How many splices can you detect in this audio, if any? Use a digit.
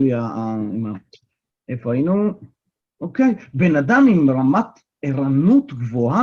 1